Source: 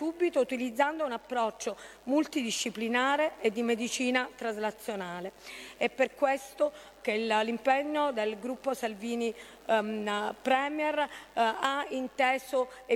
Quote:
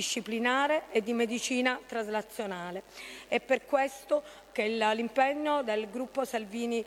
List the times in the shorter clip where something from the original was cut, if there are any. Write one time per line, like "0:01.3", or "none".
none